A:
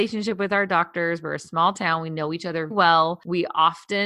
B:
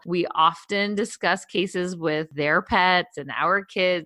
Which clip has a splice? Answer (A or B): A